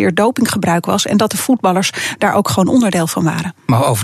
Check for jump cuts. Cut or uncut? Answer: uncut